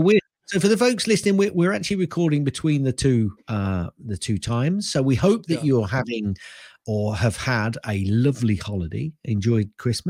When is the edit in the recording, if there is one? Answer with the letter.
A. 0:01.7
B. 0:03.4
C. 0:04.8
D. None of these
B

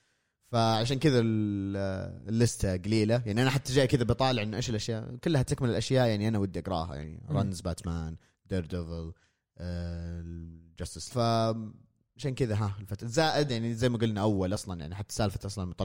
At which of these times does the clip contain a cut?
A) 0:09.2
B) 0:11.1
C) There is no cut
B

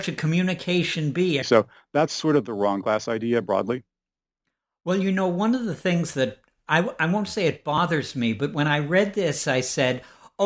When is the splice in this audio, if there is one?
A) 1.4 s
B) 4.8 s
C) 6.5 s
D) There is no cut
A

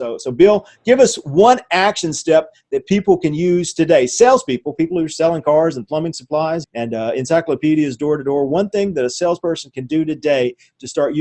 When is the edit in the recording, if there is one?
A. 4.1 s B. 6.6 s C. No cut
B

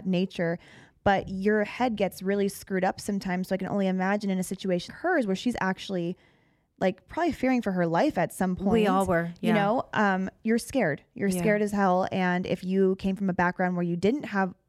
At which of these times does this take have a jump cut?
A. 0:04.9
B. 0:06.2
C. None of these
A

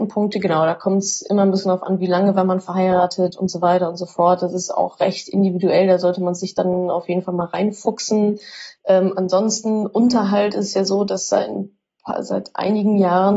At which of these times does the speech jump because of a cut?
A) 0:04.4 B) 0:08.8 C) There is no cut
B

